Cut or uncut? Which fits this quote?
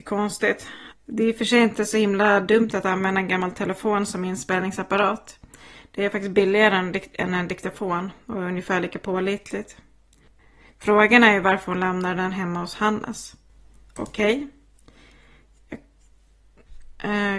cut